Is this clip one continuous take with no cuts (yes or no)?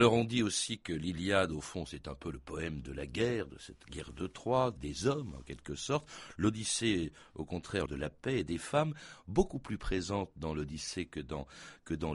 no